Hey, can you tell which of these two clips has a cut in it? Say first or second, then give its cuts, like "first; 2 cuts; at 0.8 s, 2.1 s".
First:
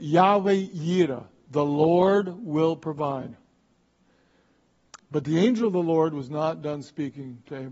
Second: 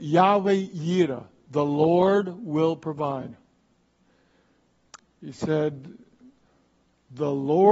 second; 1 cut; at 5.0 s